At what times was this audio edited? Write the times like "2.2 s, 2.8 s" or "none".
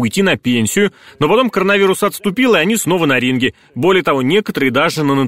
none